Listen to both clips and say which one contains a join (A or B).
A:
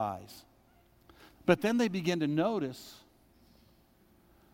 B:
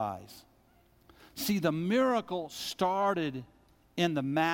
A